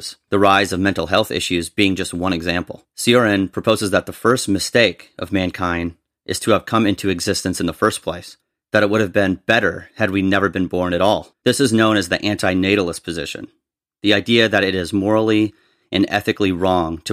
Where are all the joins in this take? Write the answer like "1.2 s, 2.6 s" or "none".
2.9 s, 11.3 s